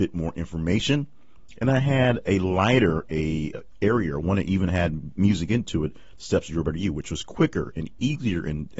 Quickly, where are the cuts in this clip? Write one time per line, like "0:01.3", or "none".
none